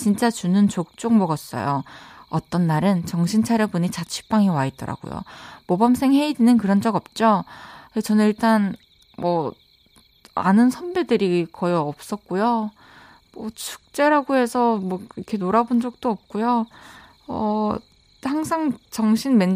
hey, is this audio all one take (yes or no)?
yes